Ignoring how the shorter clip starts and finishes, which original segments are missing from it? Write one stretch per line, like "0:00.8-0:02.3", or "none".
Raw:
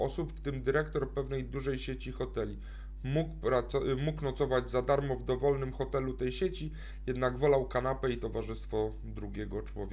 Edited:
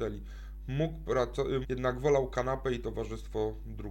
0:04.0-0:07.0

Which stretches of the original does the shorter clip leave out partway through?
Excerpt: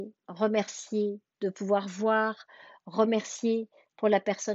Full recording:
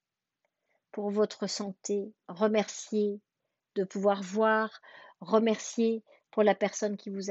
0:03.3-0:03.6

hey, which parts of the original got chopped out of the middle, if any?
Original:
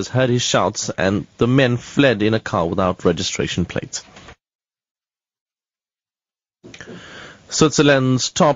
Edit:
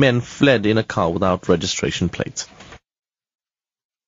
none

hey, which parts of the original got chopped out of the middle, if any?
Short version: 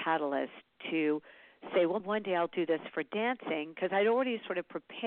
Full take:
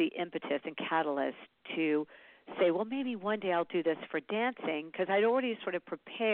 0:02.8-0:03.2

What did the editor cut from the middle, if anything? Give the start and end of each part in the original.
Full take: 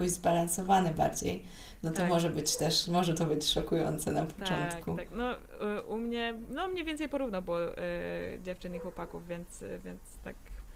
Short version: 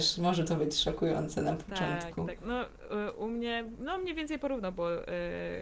none

